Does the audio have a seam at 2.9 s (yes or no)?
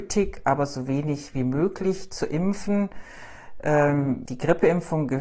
no